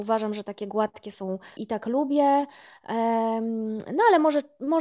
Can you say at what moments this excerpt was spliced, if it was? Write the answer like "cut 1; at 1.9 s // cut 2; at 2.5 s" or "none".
cut 1; at 1.6 s